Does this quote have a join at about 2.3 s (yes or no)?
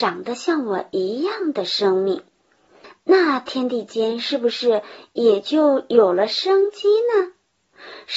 no